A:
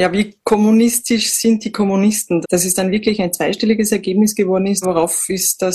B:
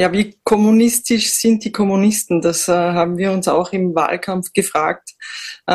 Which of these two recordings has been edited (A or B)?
A